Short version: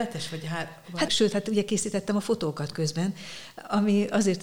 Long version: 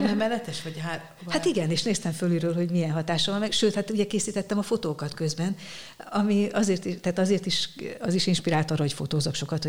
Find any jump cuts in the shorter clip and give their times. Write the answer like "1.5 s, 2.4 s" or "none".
1.1 s